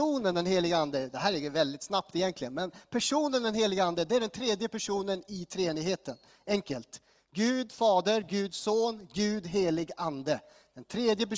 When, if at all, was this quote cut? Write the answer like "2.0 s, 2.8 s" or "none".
none